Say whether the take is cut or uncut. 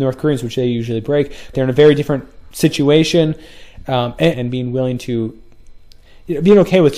cut